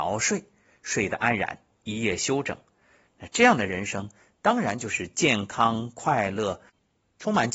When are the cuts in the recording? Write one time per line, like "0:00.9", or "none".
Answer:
none